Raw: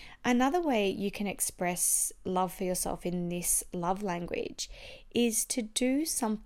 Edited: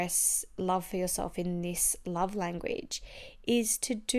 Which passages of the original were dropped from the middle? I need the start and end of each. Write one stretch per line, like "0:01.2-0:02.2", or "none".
none